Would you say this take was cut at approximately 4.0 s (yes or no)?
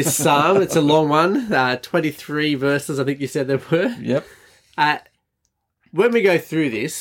no